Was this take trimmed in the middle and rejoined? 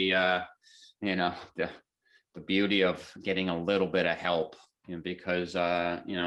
no; 0 cuts

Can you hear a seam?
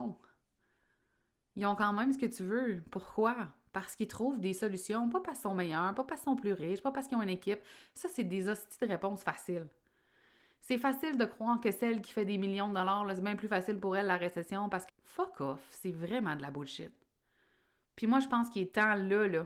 yes; 2 cuts; at 14.9 s, 17.8 s

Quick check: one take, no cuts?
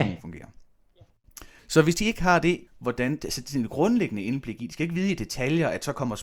no; 2 cuts; at 1.6 s, 2.7 s

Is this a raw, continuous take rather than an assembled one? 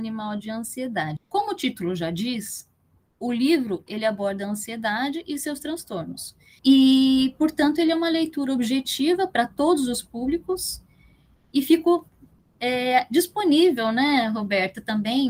no; 2 cuts; at 1.2 s, 6.6 s

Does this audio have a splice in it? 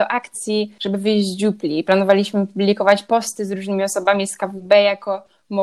no; 0 cuts

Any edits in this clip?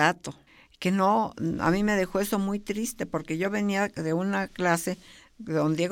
no; 0 cuts

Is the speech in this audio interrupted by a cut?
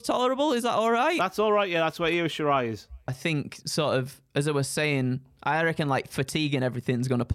yes; 1 cut; at 3.1 s

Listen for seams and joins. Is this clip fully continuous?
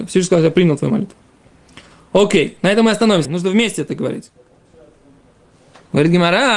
no; 1 cut; at 3.2 s

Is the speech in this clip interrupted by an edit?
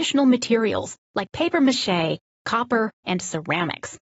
yes; 1 cut; at 3.0 s

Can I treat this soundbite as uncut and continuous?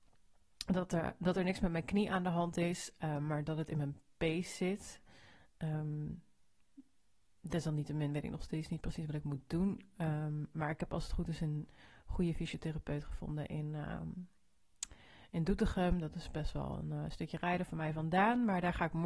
yes; 0 cuts

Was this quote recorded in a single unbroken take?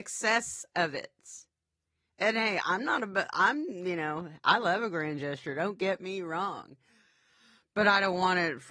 yes; 0 cuts

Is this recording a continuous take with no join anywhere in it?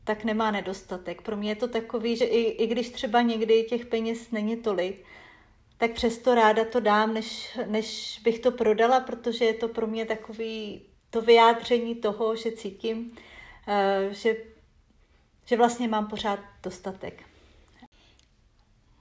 yes; 0 cuts

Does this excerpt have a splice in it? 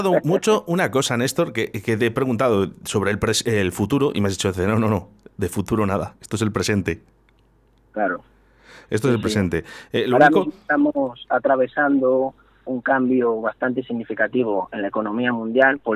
no; 0 cuts

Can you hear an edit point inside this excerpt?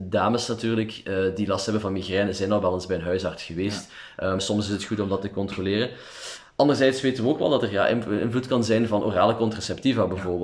yes; 1 cut; at 4.4 s

